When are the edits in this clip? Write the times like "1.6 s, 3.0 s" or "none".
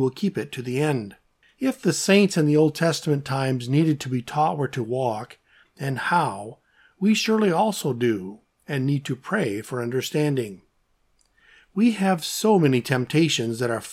1.4 s